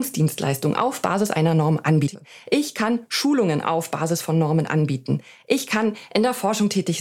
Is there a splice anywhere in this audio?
no; 0 cuts

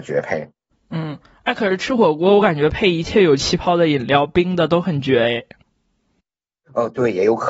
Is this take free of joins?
yes; 0 cuts

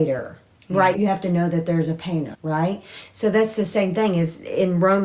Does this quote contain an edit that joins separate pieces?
yes; 2 cuts; at 0.9 s, 2.3 s

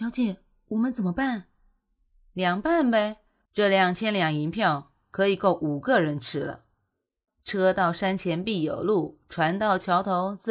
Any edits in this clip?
yes; 2 cuts; at 3.5 s, 7.3 s

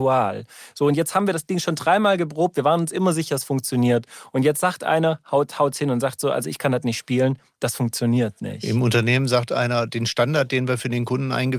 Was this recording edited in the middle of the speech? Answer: no; 0 cuts

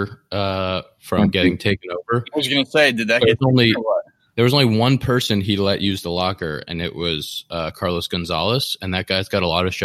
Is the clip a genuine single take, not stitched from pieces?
yes; 0 cuts

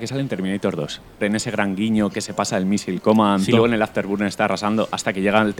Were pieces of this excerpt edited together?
yes; 2 cuts; at 1.2 s, 3.5 s

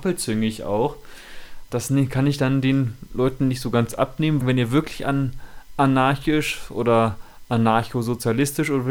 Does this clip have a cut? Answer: yes; 2 cuts; at 1.7 s, 4.4 s

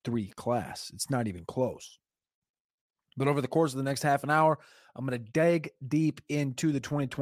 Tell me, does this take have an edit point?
no; 0 cuts

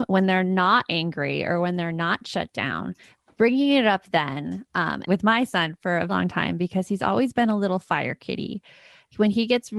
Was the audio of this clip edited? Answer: yes; 2 cuts; at 5.0 s, 6.1 s

